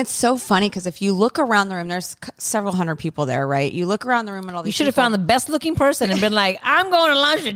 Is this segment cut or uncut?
uncut